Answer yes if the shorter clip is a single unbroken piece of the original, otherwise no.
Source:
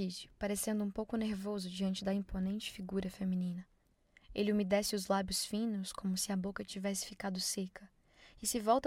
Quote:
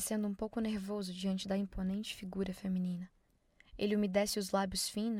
yes